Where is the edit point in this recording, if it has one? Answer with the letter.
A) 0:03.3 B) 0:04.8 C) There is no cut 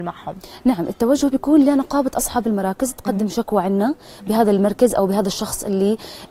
C